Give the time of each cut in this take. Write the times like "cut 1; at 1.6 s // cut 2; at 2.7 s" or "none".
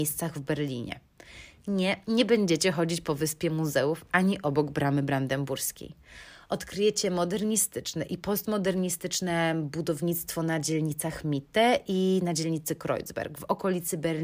none